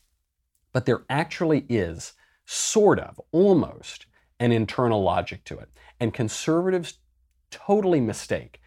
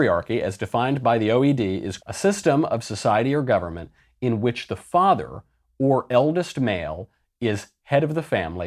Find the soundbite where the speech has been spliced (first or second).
second